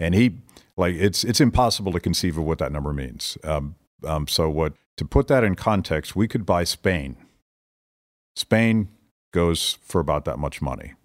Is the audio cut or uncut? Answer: cut